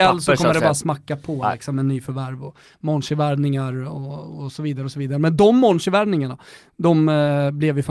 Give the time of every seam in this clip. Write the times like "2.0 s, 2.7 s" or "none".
none